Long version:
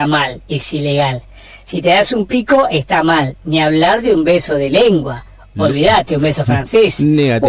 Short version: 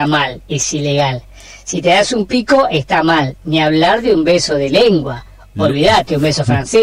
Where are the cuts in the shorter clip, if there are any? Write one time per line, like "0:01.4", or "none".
none